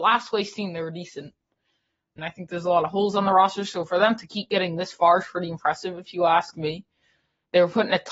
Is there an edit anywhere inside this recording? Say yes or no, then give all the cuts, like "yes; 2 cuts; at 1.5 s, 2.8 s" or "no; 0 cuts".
yes; 1 cut; at 2.2 s